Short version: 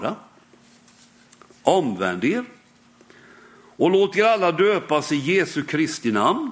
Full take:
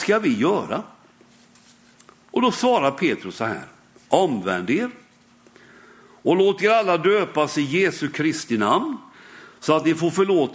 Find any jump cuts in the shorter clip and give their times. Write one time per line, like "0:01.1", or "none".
0:01.5